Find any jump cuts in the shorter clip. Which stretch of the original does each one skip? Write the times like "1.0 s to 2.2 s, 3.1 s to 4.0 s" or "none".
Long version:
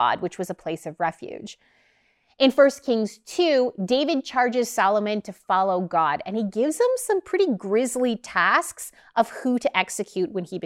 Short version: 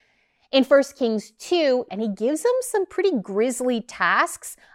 3.8 s to 6.2 s